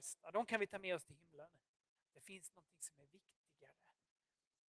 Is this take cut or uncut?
cut